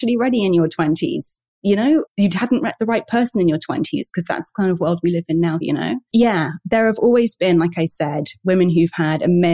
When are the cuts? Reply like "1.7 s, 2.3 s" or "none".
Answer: 2.1 s, 5.6 s